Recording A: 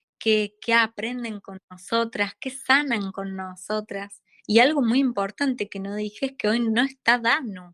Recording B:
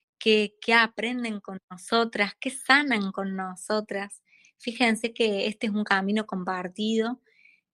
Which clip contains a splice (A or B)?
A